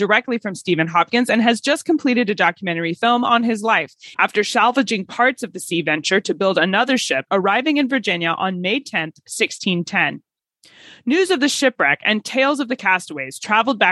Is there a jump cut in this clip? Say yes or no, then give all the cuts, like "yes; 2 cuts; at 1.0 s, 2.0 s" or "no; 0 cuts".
yes; 2 cuts; at 4.1 s, 7.3 s